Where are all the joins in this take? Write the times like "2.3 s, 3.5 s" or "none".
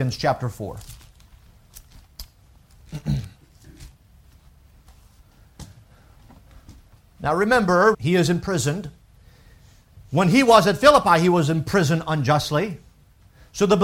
3.9 s, 7.9 s